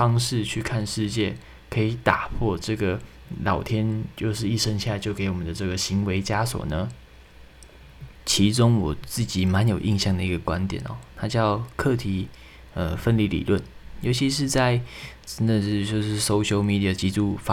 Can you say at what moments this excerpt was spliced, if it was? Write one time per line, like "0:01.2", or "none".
0:08.2